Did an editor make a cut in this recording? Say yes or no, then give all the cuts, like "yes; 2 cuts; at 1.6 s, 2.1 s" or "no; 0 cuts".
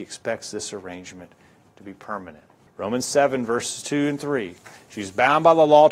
yes; 1 cut; at 2.7 s